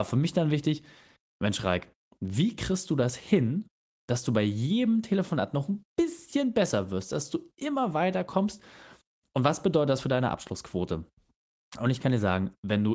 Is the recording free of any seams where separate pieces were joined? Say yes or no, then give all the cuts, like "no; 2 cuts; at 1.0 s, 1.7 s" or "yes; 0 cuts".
yes; 0 cuts